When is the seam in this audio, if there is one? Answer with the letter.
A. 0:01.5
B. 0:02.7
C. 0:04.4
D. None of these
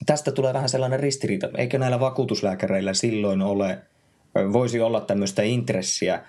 A